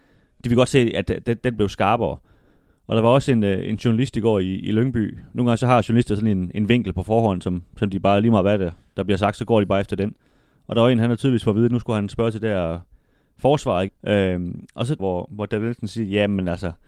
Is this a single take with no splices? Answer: no; 2 cuts; at 13.9 s, 15.0 s

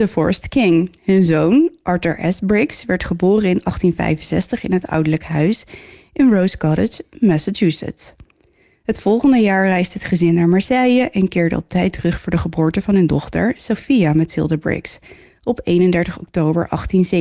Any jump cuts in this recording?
no; 0 cuts

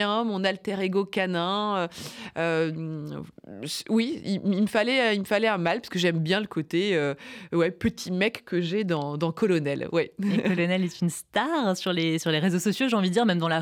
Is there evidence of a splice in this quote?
no; 0 cuts

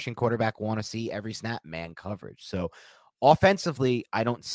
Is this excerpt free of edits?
yes; 0 cuts

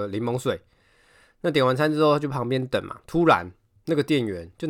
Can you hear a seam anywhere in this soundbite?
yes; 1 cut; at 3.0 s

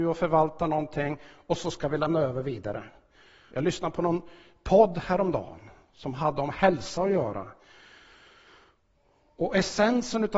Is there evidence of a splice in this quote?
yes; 1 cut; at 3.5 s

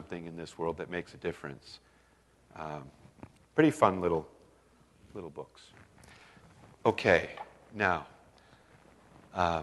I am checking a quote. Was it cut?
yes; 1 cut; at 3.4 s

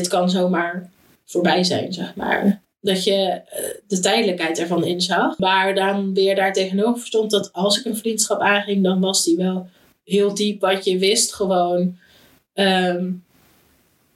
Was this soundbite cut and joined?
yes; 2 cuts; at 2.6 s, 5.4 s

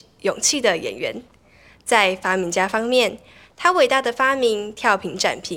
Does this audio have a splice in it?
no; 0 cuts

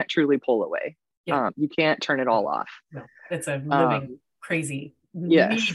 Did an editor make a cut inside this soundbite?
no; 0 cuts

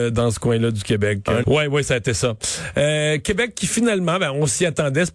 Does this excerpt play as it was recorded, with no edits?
no; 1 cut; at 1.4 s

